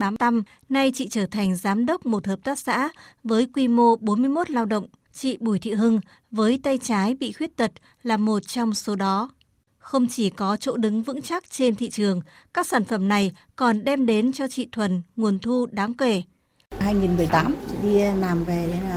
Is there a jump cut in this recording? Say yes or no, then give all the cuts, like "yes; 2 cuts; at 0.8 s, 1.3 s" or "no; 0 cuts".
yes; 3 cuts; at 5.1 s, 9.7 s, 16.7 s